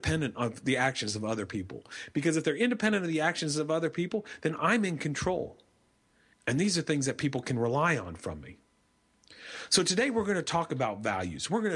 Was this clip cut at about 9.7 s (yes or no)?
no